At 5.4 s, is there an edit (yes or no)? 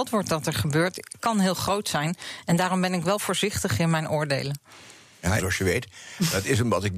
yes